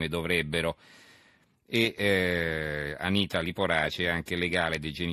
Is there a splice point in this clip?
no; 0 cuts

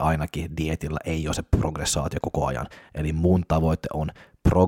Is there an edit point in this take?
no; 0 cuts

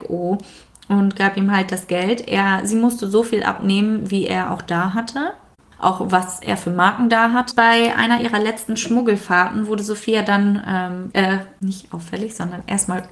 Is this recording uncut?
no; 2 cuts; at 7.5 s, 11.1 s

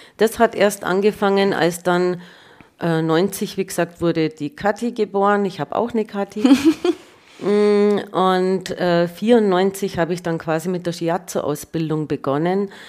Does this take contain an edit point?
no; 0 cuts

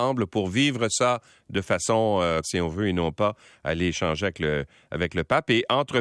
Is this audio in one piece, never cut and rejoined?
no; 1 cut; at 2.4 s

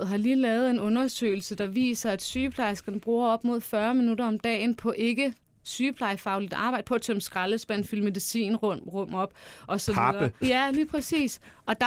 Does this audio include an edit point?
yes; 1 cut; at 10.4 s

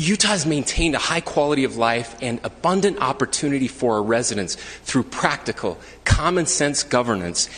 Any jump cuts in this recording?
no; 0 cuts

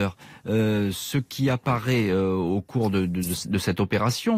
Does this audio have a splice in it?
no; 0 cuts

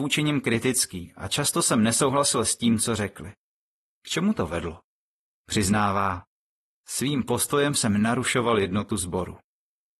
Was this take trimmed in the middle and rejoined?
no; 0 cuts

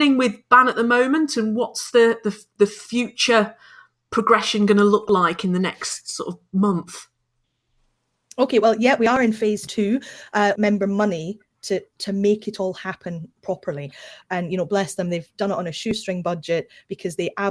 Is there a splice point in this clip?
yes; 2 cuts; at 10.6 s, 14.2 s

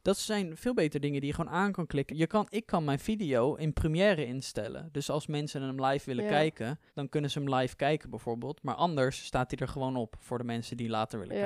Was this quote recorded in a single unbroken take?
no; 2 cuts; at 2.1 s, 6.9 s

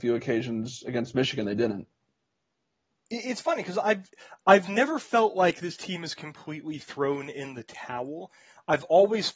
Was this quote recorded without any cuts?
yes; 0 cuts

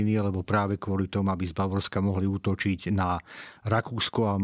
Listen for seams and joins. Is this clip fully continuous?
yes; 0 cuts

